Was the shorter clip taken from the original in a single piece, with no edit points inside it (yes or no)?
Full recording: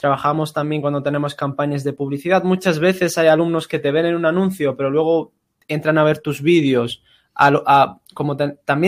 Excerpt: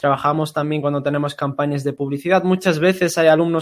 yes